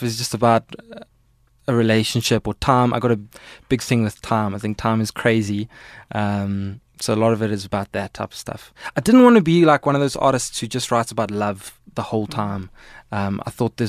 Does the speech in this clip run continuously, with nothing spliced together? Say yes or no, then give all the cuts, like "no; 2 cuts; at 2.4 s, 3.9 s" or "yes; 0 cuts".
yes; 0 cuts